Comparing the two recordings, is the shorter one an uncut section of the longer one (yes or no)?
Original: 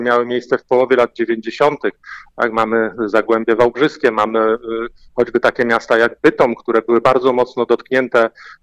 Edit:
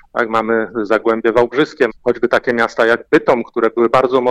no